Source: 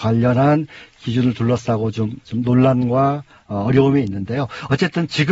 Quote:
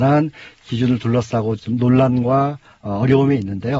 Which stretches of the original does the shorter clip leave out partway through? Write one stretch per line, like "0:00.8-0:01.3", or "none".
0:01.9-0:02.2